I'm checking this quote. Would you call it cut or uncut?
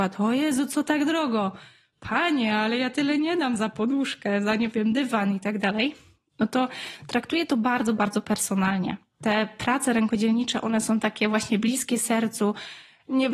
uncut